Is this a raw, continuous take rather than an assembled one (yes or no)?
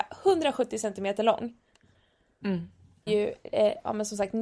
no